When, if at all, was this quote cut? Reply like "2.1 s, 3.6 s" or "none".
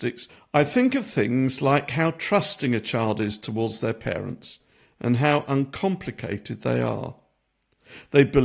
none